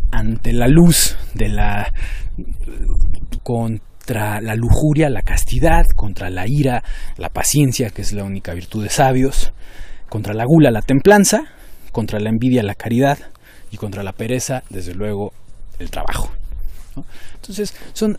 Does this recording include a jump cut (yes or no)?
yes